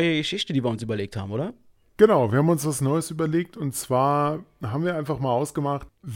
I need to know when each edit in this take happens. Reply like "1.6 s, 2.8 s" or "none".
none